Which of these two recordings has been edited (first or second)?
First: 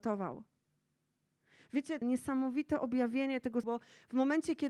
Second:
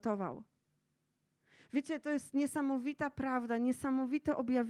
first